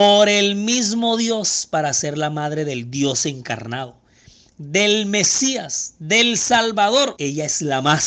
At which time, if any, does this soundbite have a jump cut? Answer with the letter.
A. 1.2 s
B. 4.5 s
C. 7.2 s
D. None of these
C